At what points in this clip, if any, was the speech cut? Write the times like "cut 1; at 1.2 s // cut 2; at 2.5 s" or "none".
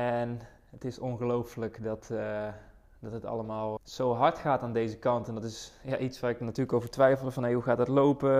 cut 1; at 3.8 s